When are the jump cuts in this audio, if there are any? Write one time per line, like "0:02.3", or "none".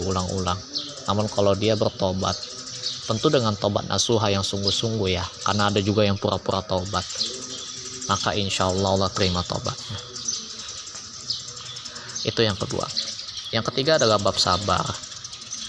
none